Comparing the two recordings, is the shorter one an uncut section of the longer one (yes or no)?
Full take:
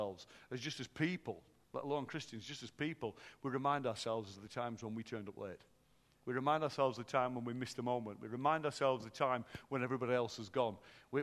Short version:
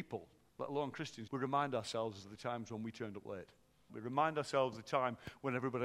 no